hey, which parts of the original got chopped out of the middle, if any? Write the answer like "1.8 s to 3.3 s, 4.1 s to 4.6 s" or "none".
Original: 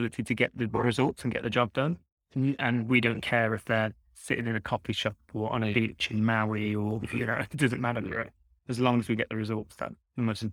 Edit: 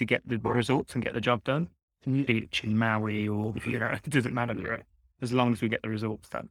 2.6 s to 5.7 s